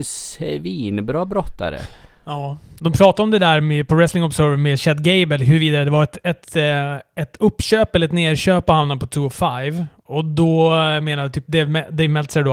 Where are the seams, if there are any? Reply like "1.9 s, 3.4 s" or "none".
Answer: none